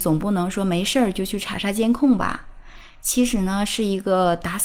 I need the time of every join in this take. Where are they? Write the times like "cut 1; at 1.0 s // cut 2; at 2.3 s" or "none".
none